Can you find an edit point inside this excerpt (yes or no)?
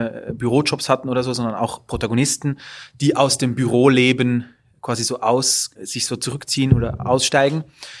yes